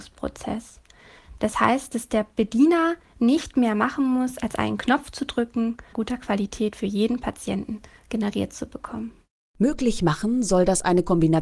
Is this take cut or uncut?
cut